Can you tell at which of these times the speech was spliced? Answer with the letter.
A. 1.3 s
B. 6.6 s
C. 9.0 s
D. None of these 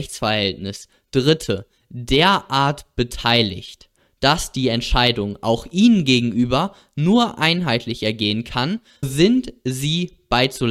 C